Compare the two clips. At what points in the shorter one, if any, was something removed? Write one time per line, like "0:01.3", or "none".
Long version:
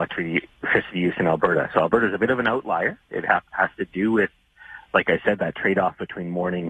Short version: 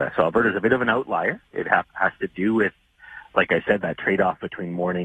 none